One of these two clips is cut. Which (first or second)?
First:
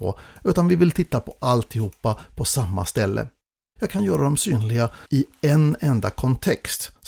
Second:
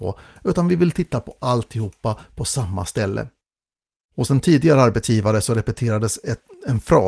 first